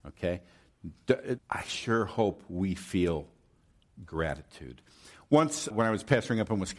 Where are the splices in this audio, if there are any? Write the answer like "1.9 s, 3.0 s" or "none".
1.4 s, 5.7 s